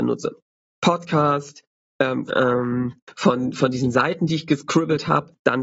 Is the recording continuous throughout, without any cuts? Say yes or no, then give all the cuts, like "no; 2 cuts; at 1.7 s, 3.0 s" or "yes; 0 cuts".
no; 1 cut; at 2.3 s